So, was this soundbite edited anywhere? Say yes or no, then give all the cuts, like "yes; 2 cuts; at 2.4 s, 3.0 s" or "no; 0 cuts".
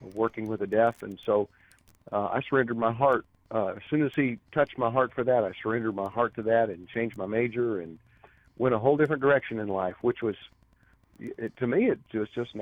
no; 0 cuts